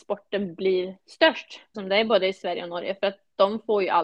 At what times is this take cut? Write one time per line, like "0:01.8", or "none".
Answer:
0:01.7